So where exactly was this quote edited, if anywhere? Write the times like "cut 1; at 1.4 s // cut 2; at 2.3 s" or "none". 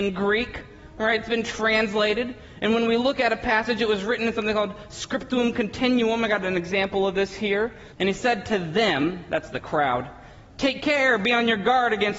cut 1; at 7.9 s